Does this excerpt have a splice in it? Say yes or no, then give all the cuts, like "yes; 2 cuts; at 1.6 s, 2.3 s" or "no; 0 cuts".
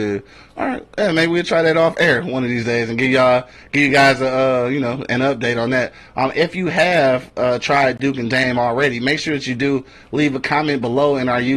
no; 0 cuts